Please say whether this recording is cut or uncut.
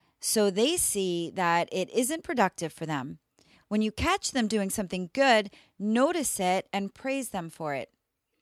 uncut